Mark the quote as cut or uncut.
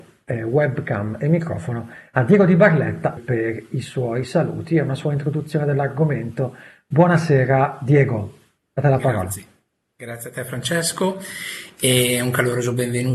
cut